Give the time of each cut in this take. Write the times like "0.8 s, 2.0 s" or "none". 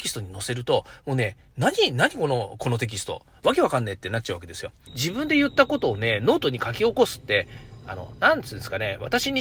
4.9 s